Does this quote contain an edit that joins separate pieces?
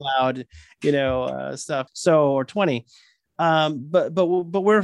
yes; 1 cut; at 1.9 s

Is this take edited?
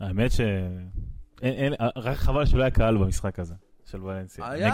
yes; 1 cut; at 1.3 s

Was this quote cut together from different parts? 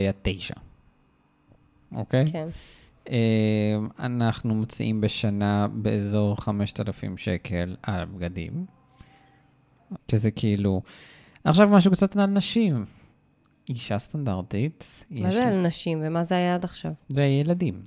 yes; 1 cut; at 10.0 s

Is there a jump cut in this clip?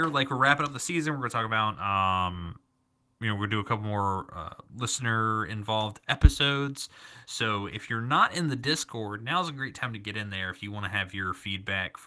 no; 0 cuts

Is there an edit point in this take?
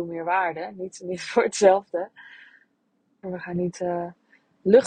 yes; 1 cut; at 3.2 s

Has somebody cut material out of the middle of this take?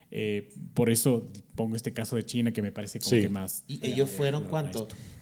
yes; 1 cut; at 3.8 s

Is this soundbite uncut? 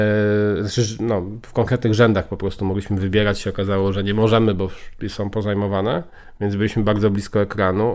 yes; 0 cuts

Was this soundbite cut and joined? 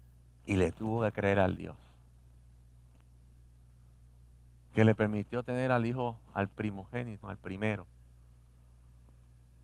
yes; 1 cut; at 7.2 s

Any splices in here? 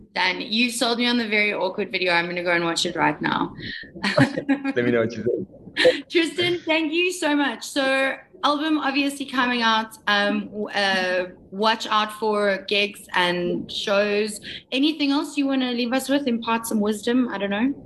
no; 0 cuts

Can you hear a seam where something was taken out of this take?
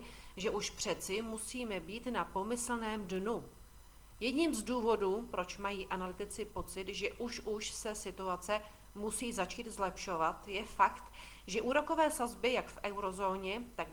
no; 0 cuts

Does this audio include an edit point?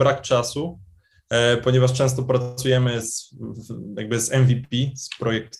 yes; 1 cut; at 3.0 s

